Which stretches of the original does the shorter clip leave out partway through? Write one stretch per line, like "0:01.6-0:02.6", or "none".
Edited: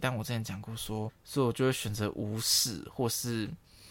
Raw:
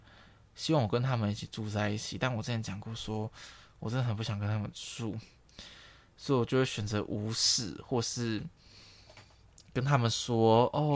0:03.3-0:06.0